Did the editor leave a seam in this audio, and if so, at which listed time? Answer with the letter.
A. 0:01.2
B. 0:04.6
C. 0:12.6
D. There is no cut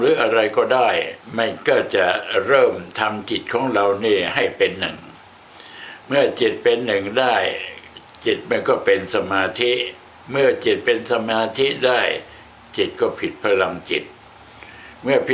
A